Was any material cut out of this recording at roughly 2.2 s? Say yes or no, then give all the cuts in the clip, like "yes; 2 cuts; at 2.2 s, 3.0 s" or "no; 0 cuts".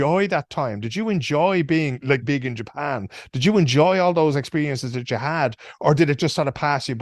yes; 1 cut; at 2.2 s